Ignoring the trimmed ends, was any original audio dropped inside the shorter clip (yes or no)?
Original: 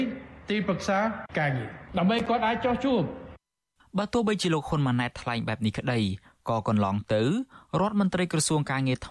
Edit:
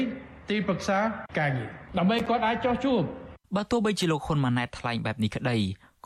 yes